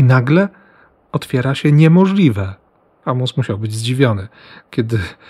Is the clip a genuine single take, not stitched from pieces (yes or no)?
yes